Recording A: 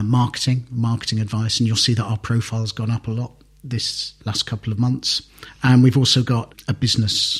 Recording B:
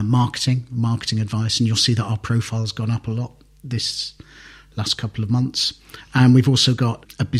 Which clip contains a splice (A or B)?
A